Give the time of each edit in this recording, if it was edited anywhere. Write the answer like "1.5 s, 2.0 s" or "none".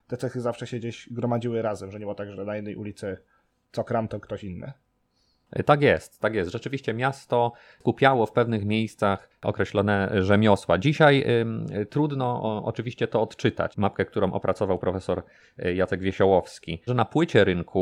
13.7 s, 16.9 s